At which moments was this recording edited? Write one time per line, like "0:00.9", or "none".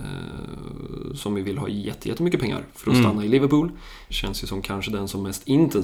0:04.1